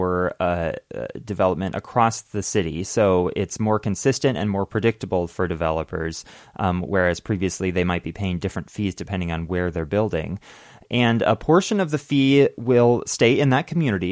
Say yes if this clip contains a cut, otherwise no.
no